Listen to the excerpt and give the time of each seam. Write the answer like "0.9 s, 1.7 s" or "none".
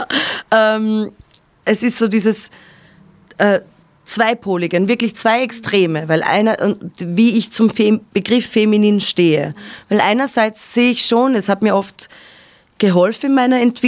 none